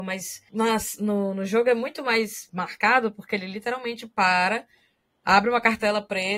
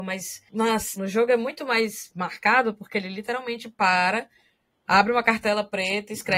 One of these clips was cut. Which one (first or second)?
second